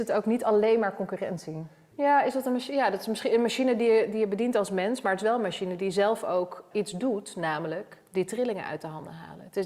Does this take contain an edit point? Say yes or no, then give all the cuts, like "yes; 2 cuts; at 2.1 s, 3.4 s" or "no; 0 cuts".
yes; 2 cuts; at 1.9 s, 6.7 s